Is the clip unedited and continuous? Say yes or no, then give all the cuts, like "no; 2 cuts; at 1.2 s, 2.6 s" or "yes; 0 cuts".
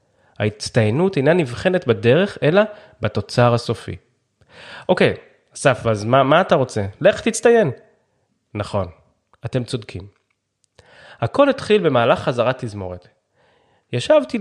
yes; 0 cuts